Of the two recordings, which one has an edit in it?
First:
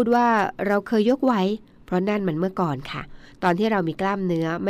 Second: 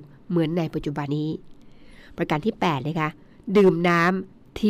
second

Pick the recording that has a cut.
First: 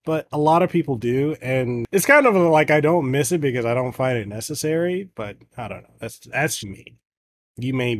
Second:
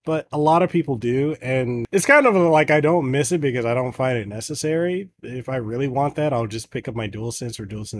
first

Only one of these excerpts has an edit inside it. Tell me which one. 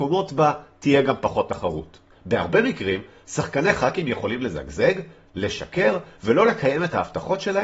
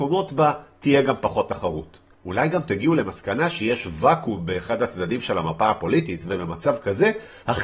first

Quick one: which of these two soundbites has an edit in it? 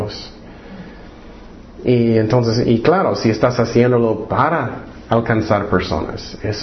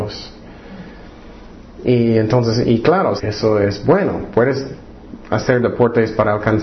second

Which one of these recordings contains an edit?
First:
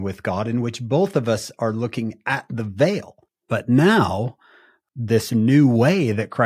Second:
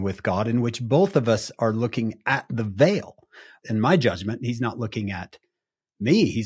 first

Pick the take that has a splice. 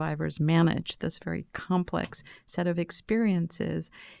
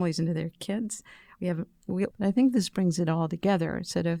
second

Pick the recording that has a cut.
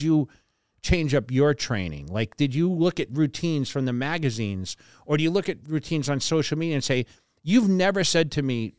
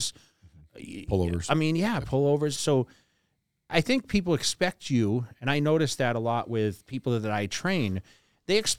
second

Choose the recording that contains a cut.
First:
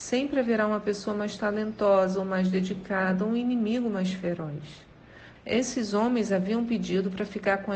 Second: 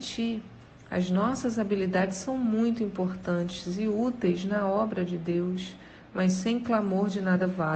first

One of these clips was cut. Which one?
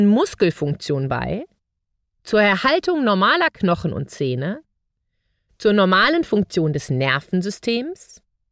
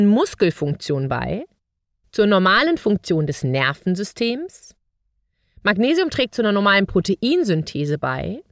second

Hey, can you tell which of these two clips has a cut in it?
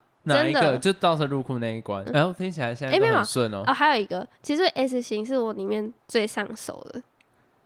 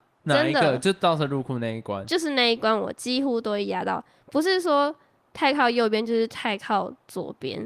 first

